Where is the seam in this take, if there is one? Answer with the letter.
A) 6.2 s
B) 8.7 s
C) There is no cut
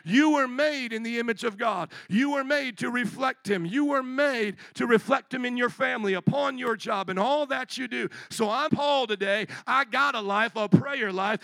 B